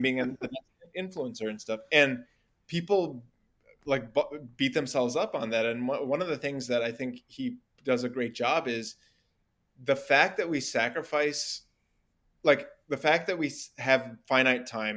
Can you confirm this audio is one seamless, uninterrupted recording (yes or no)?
yes